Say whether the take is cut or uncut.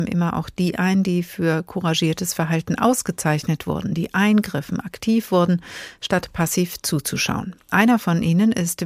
uncut